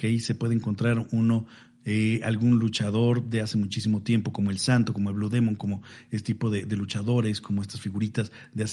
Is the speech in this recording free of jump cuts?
yes; 0 cuts

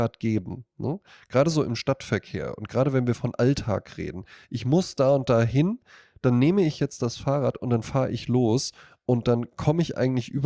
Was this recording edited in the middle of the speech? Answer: no; 0 cuts

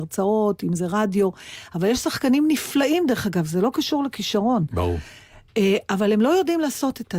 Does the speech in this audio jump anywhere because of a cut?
no; 0 cuts

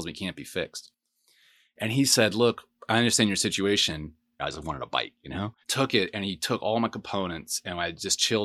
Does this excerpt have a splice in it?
yes; 2 cuts; at 4.4 s, 5.6 s

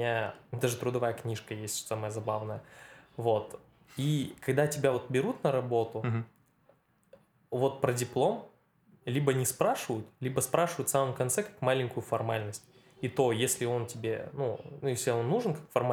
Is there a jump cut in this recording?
no; 0 cuts

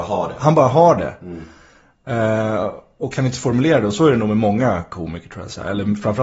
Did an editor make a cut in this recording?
no; 0 cuts

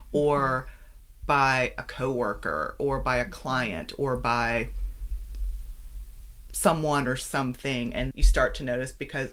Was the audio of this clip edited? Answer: yes; 1 cut; at 8.1 s

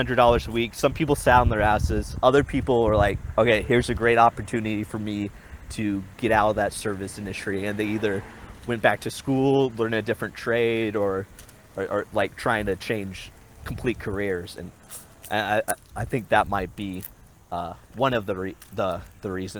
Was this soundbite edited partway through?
no; 0 cuts

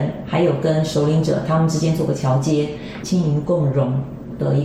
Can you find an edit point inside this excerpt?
yes; 1 cut; at 3.0 s

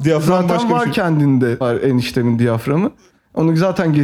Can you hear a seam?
yes; 1 cut; at 1.6 s

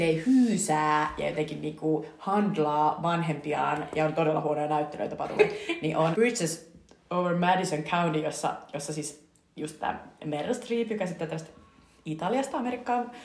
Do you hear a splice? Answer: yes; 1 cut; at 6.1 s

